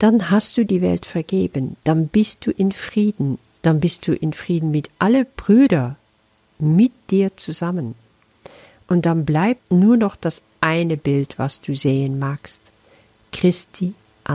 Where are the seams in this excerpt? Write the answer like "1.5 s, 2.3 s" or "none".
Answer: none